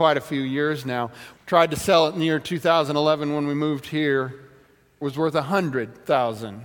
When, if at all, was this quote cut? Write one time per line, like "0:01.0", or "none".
0:01.4
0:05.0